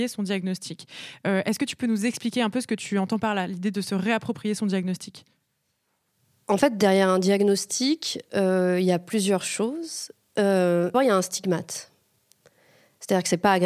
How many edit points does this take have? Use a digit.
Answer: 1